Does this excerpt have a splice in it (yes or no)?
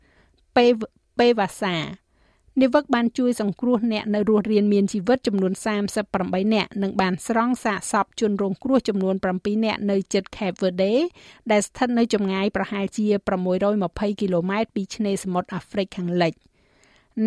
no